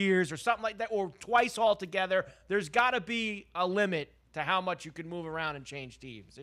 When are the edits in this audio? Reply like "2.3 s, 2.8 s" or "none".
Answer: none